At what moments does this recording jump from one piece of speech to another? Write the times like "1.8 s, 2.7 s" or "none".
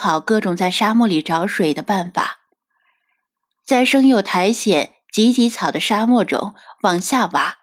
none